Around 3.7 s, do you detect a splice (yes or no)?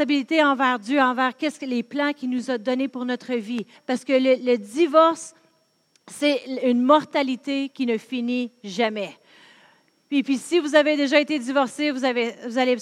yes